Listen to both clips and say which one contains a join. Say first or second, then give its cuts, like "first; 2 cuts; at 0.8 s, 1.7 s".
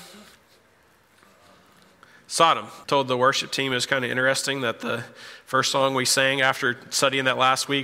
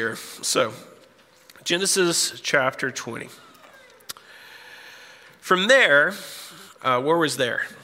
first; 1 cut; at 2.8 s